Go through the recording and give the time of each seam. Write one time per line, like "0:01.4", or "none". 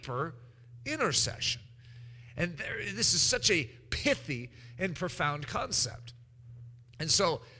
0:02.3